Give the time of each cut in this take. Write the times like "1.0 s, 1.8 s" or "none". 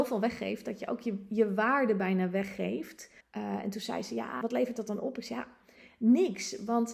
3.2 s, 4.4 s

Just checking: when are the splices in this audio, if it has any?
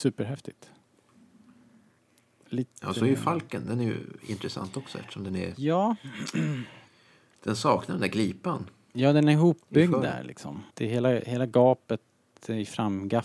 10.7 s

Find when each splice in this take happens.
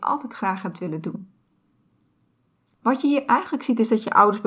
none

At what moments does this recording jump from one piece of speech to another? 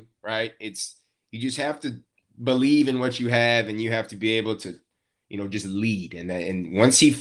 none

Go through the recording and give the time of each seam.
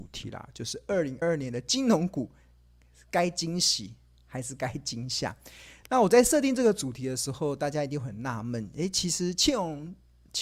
1.2 s

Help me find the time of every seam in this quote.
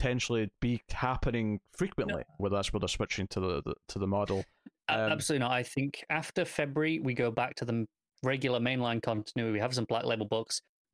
2.4 s

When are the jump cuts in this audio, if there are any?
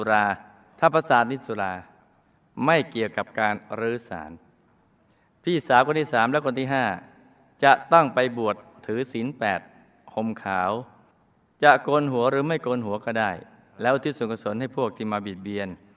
none

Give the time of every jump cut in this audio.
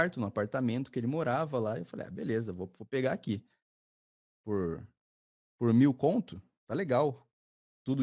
none

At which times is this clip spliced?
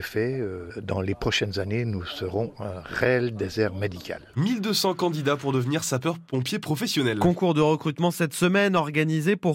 4.3 s

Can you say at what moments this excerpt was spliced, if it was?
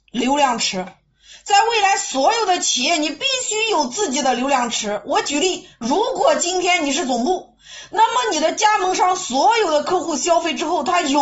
none

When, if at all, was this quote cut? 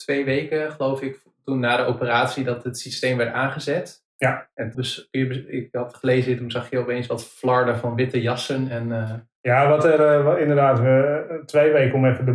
4.7 s

